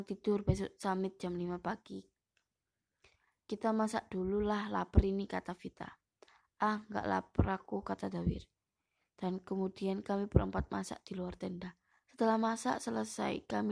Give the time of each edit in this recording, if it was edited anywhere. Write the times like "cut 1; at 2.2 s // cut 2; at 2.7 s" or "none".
cut 1; at 12.0 s